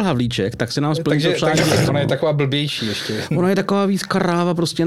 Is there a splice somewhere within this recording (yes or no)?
yes